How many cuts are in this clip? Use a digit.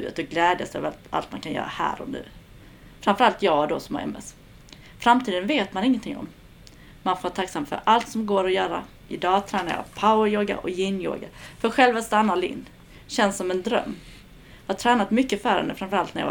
1